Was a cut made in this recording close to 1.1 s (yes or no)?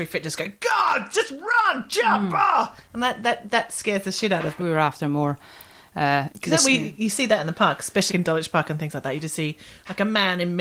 no